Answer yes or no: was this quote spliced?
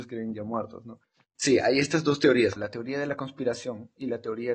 yes